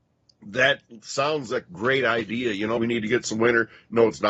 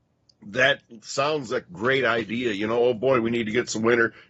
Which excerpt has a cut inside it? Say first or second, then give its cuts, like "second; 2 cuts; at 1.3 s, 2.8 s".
first; 1 cut; at 2.8 s